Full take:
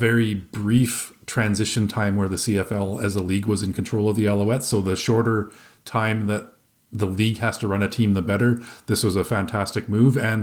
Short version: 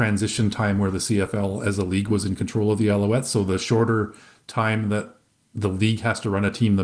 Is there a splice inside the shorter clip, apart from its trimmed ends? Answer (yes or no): no